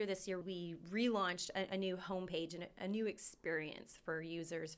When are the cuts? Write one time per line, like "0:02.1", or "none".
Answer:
none